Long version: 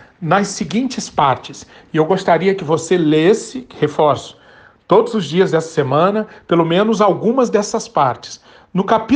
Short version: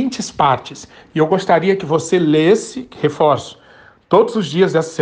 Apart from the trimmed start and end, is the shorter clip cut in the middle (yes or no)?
no